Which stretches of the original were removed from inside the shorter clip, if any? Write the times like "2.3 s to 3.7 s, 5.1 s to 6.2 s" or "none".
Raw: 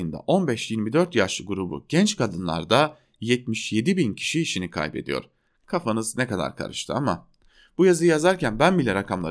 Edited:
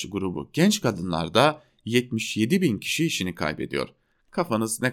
none